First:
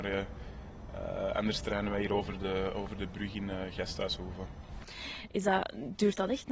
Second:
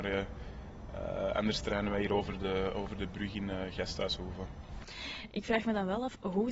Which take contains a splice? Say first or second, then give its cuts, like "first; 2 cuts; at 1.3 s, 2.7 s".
first; 1 cut; at 5.3 s